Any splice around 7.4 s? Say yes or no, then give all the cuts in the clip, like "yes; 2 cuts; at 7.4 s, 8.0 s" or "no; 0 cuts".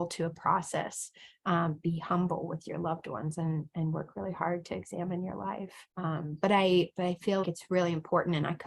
yes; 2 cuts; at 5.9 s, 7.4 s